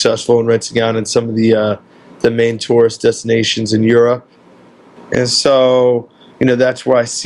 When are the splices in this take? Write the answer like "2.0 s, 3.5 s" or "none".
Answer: 5.0 s